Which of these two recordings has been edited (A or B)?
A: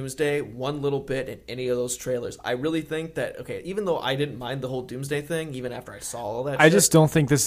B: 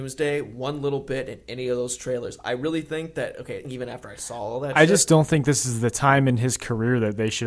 B